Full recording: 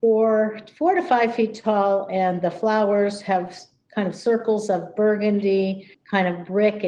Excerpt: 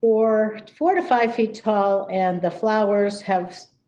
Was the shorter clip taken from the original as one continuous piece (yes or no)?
yes